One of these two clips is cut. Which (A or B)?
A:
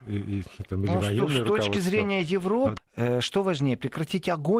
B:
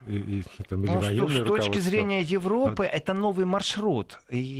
A